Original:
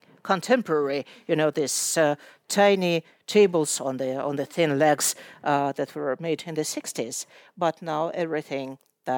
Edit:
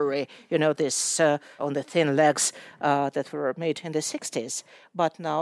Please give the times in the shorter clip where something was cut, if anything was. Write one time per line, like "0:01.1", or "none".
0:01.6